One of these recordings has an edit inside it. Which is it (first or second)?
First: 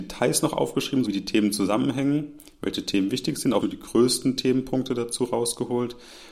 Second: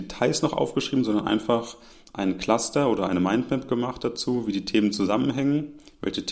first